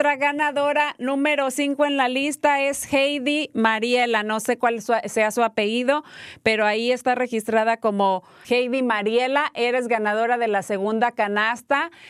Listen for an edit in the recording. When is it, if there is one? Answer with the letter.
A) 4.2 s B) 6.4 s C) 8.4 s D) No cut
C